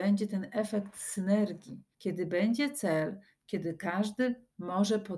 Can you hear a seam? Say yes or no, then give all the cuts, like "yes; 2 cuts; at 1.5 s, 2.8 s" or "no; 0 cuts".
yes; 1 cut; at 1.9 s